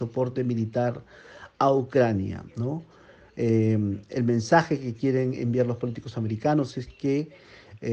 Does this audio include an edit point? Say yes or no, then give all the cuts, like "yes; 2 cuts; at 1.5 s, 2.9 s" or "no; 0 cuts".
no; 0 cuts